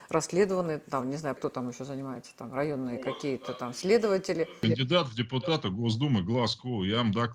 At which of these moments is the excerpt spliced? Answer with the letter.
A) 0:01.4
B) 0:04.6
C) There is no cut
A